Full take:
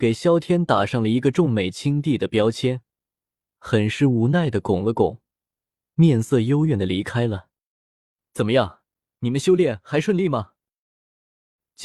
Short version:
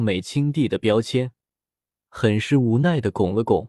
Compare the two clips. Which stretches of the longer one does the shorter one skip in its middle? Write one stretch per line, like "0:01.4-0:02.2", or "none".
none